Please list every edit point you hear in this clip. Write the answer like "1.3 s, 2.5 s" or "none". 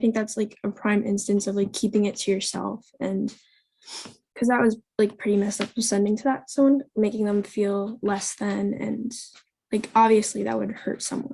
none